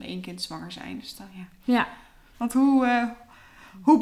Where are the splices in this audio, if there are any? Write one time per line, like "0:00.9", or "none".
0:02.3

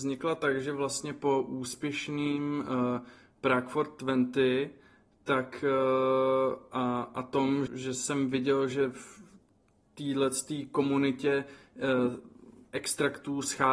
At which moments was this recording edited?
0:07.7

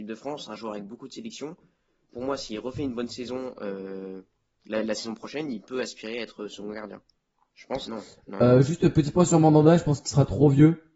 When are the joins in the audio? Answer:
0:07.9

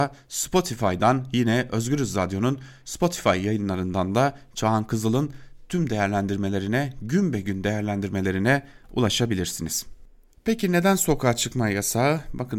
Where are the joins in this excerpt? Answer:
none

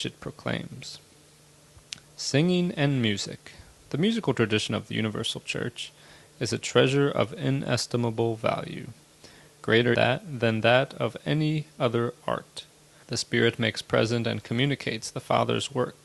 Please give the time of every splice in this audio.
0:02.0
0:09.9
0:13.0

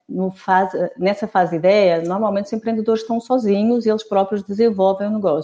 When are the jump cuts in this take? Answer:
none

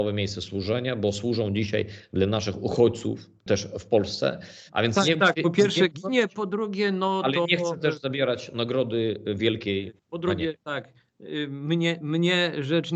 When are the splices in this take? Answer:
0:04.7

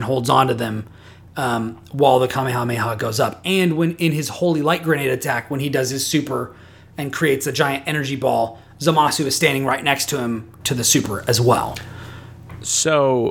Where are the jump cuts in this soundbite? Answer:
0:10.6

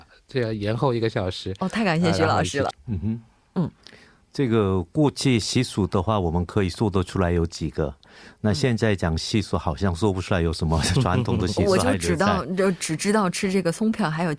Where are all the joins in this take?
0:02.7

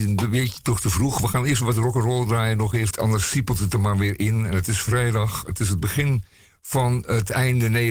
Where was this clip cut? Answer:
0:02.9

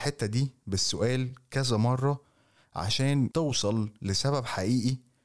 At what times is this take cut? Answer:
none

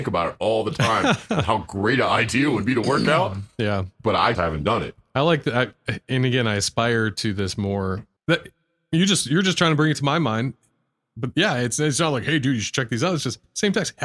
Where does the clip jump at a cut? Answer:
0:04.3
0:08.2

